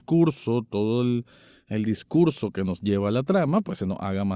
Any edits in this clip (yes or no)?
no